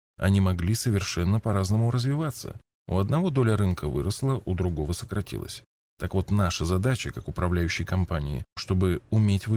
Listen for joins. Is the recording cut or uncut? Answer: cut